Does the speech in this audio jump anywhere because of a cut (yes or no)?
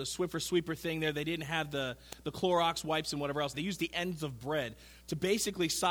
yes